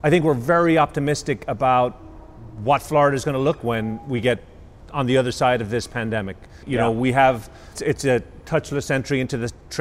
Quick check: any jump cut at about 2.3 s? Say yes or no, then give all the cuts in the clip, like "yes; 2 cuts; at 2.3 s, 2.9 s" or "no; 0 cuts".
no; 3 cuts; at 3.6 s, 6.6 s, 7.7 s